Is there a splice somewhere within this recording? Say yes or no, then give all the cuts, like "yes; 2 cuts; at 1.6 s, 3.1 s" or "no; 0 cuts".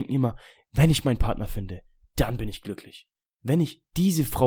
no; 0 cuts